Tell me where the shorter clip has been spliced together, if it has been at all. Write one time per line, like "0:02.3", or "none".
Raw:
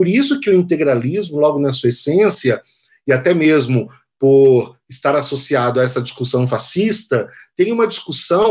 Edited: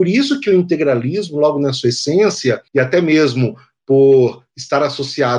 0:02.7

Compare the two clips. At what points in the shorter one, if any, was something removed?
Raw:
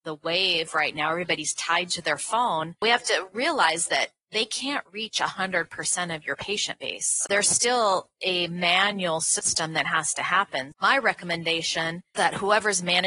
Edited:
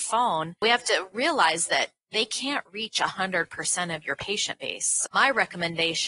0:05.1

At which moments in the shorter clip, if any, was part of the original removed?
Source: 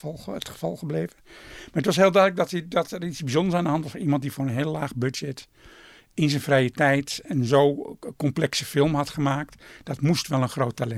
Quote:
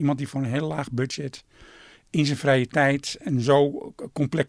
none

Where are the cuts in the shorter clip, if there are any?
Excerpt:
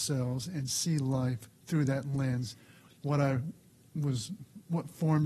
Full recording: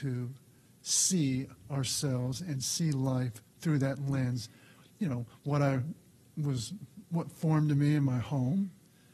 0:03.0

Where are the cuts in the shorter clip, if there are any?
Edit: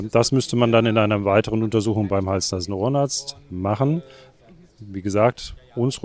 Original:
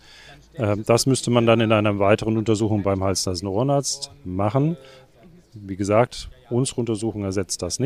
none

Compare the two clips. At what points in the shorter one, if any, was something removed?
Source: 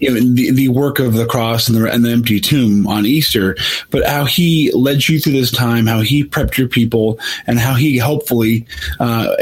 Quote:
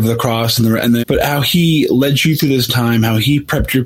0:01.0

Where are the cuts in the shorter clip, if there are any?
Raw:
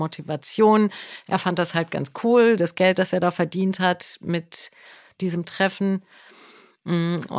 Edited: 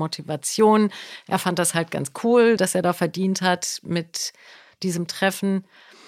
0:02.6

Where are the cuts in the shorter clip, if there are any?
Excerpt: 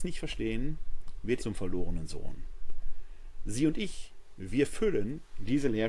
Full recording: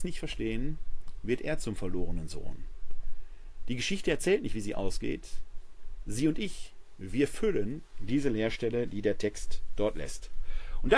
0:01.4
0:03.4

